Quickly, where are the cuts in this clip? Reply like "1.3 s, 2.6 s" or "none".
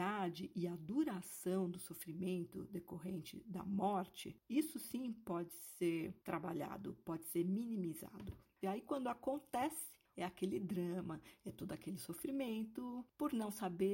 8.6 s, 10.1 s